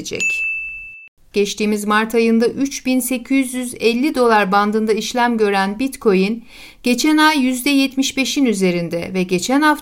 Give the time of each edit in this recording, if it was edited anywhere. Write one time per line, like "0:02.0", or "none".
0:01.3